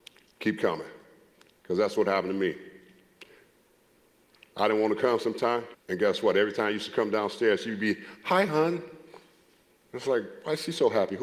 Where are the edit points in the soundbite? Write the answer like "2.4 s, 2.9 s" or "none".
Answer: 5.7 s